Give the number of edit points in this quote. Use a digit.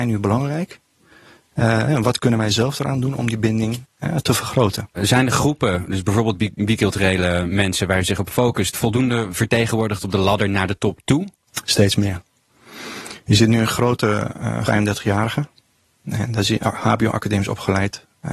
1